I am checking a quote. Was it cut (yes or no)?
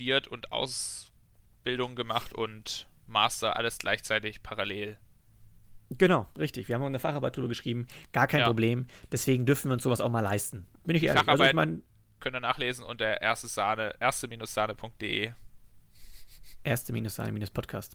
no